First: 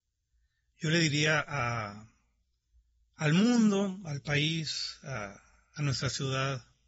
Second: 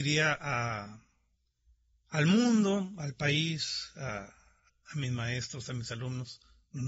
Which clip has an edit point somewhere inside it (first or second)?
second